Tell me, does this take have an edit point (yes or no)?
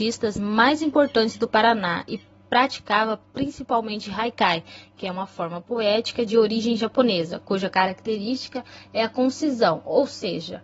no